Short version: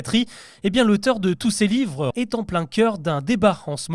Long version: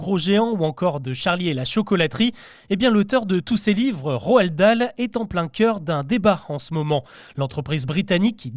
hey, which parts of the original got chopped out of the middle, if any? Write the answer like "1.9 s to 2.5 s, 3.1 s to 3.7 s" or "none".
4.2 s to 4.9 s